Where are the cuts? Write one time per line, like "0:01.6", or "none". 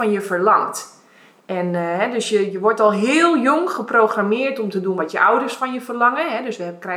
none